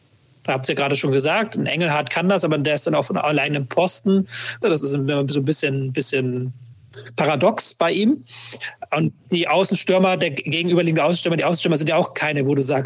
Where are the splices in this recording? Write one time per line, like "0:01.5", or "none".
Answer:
0:04.6